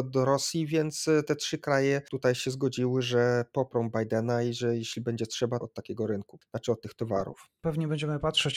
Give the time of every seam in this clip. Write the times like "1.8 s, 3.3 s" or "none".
5.6 s